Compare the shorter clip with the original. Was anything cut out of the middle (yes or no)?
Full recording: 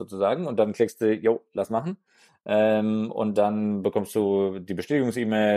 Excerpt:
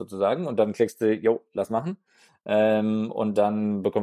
no